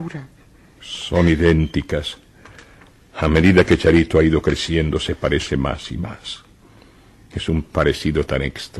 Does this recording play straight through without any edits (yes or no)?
yes